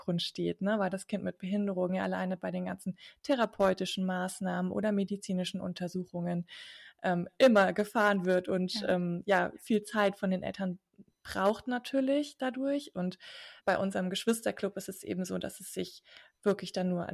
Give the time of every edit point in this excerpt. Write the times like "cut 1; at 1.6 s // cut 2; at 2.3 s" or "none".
cut 1; at 13.6 s